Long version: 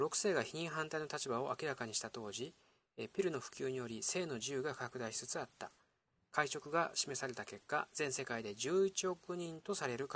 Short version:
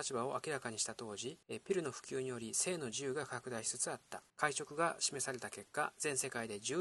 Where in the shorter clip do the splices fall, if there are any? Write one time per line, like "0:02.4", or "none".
0:01.4
0:04.3